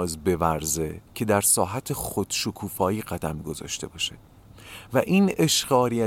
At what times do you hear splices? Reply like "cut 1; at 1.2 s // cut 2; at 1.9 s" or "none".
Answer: cut 1; at 1.1 s